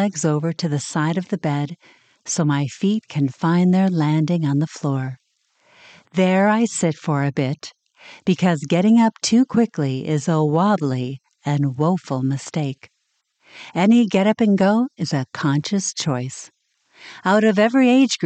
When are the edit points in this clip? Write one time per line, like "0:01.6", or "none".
none